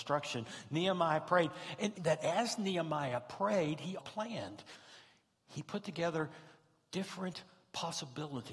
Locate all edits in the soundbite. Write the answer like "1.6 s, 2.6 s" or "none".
1.9 s, 4.0 s